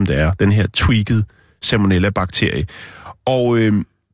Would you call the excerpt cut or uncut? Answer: uncut